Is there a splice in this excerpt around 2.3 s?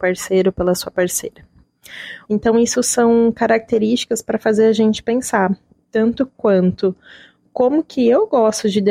yes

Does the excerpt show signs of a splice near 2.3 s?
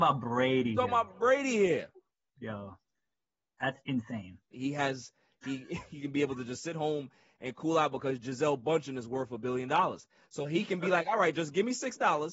no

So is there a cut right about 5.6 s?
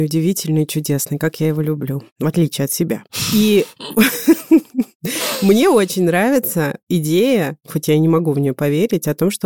no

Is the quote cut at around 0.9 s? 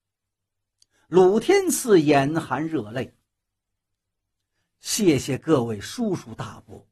no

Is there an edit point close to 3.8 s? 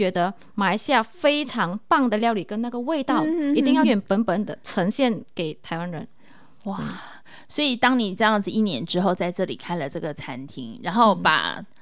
yes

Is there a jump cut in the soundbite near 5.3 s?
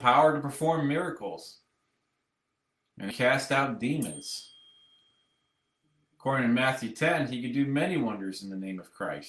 no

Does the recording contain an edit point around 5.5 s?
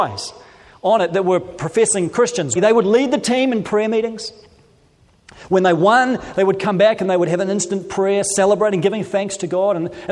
no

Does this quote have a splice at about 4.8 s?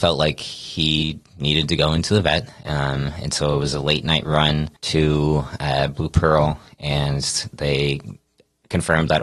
yes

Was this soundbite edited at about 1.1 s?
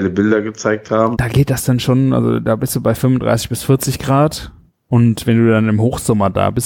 yes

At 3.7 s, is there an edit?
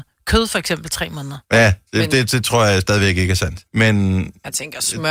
yes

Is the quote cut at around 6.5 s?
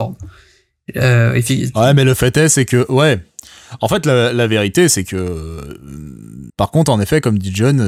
yes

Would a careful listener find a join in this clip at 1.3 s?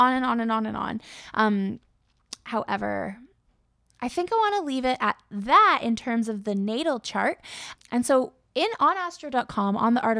no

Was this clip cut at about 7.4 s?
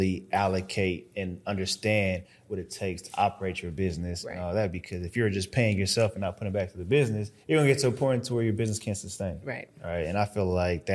yes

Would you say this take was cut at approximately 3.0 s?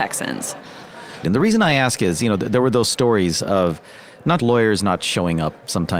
no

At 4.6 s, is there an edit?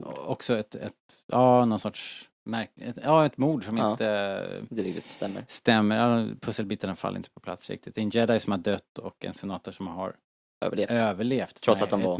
no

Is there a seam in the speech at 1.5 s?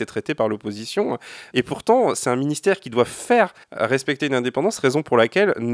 yes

